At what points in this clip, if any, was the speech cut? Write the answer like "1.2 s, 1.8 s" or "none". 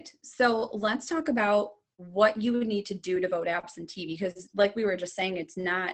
none